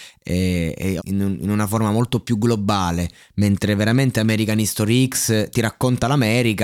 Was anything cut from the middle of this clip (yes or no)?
yes